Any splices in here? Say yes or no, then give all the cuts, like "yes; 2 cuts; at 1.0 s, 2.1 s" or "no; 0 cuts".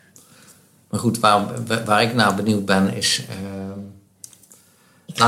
no; 0 cuts